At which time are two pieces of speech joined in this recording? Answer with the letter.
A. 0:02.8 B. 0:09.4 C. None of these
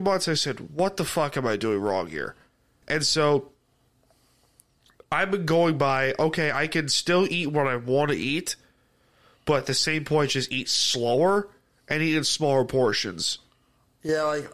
A